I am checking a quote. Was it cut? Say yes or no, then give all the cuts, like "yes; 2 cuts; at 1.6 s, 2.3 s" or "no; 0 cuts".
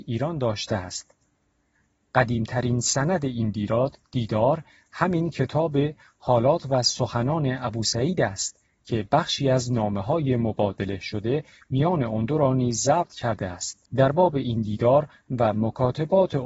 yes; 1 cut; at 13.9 s